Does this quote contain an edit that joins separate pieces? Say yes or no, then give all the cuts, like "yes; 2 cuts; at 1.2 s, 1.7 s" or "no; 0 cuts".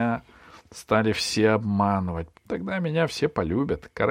yes; 1 cut; at 2.3 s